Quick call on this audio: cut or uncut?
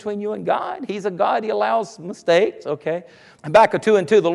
cut